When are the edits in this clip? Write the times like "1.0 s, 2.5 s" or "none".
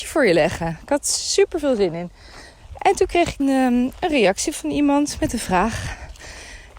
3.4 s